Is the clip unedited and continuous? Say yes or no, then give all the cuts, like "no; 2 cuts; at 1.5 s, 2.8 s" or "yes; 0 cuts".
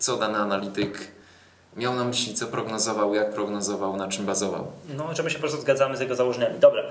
yes; 0 cuts